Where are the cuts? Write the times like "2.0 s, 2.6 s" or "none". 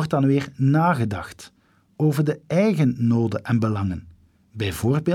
none